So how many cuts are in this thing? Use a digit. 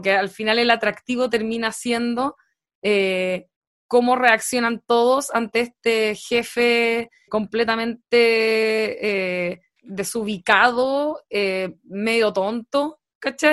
2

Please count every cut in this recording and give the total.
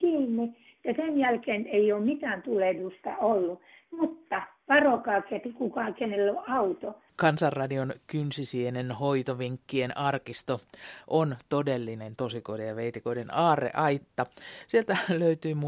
1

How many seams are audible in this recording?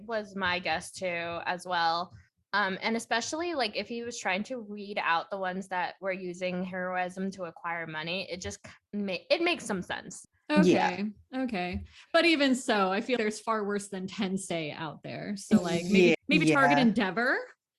2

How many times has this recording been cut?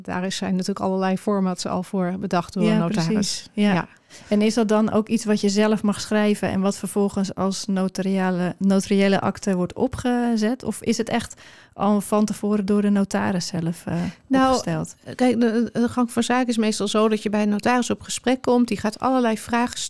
0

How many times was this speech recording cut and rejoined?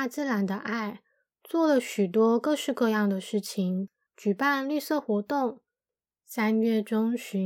2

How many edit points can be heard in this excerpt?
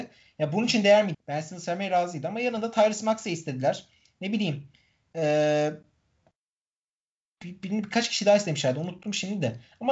1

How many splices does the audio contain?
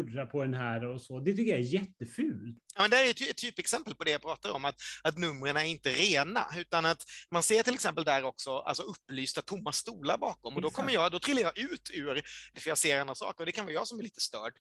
1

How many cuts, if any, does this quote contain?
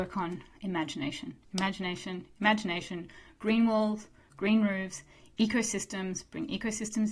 0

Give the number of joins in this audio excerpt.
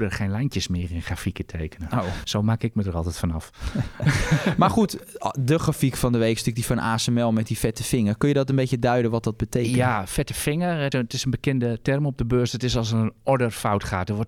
1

